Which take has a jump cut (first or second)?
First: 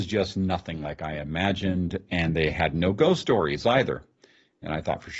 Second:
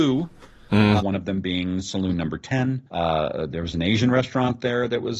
second